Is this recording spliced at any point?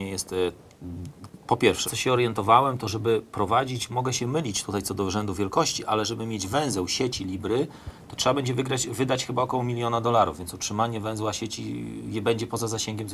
yes; 1 cut; at 1.9 s

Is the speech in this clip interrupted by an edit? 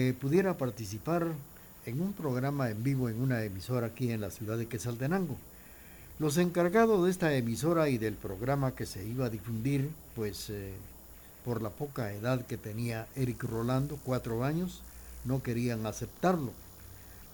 no; 0 cuts

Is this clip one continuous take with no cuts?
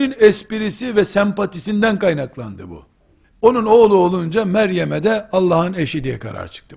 no; 1 cut; at 3.2 s

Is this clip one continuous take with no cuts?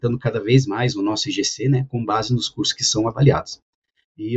yes; 0 cuts

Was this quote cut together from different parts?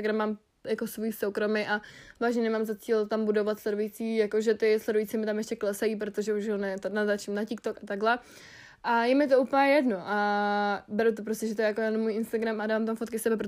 no; 0 cuts

